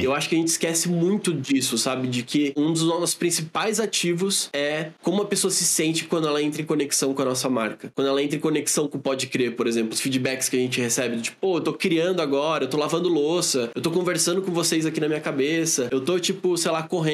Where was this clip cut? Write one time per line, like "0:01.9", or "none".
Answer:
none